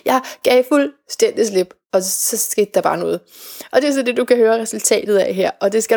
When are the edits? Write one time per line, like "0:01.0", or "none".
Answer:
none

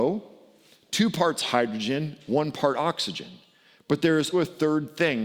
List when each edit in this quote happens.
0:04.3

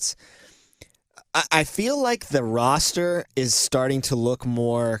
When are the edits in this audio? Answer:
none

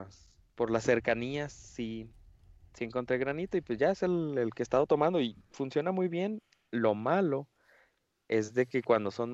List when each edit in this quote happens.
none

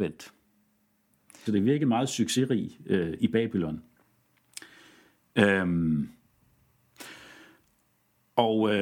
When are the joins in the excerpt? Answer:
0:01.5

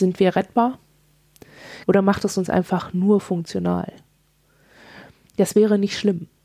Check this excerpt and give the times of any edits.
0:01.8

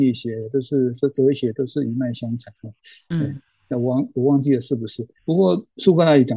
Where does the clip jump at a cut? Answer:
0:05.2

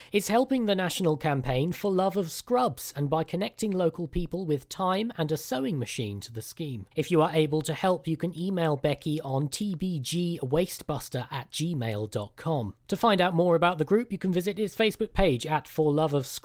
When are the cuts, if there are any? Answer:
0:06.9

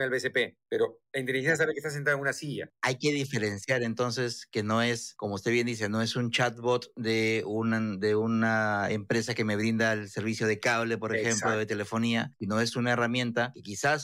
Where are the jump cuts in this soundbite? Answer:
none

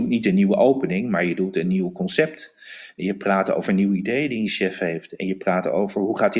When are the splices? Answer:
none

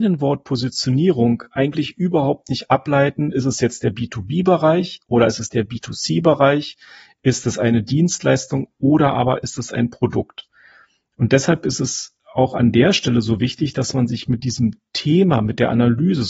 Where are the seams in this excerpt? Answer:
none

